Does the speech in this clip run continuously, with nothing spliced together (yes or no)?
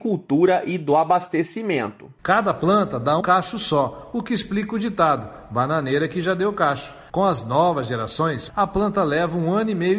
no